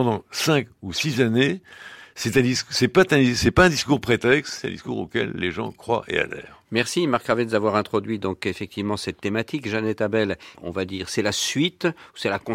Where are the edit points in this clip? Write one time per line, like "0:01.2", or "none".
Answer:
0:04.6
0:10.5